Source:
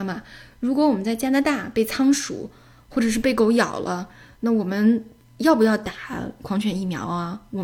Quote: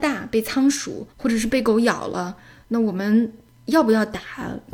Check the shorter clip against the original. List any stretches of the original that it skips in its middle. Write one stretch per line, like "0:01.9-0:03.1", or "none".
0:02.5-0:02.8